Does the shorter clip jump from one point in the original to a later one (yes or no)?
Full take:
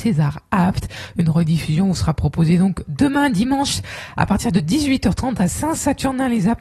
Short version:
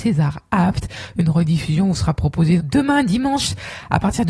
yes